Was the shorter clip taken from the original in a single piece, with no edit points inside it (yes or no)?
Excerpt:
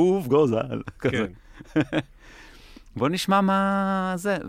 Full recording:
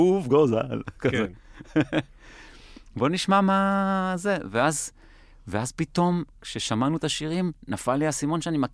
yes